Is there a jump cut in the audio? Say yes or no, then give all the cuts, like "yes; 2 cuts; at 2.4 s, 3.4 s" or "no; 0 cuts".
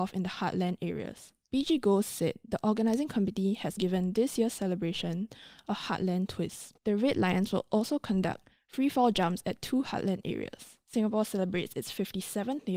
yes; 2 cuts; at 3.8 s, 6.8 s